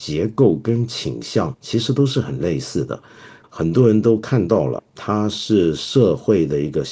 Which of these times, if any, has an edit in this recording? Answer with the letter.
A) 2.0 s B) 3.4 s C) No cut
B